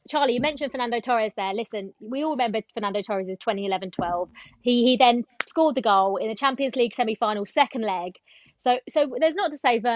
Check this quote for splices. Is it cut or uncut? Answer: uncut